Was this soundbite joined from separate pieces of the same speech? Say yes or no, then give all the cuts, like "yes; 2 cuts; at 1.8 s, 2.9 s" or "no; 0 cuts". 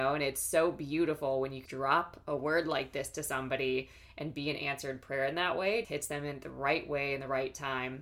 yes; 2 cuts; at 1.7 s, 5.8 s